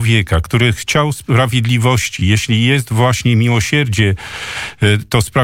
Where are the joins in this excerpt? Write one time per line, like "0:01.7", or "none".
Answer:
none